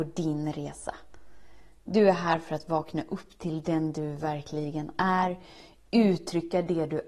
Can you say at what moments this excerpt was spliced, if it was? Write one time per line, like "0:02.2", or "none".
none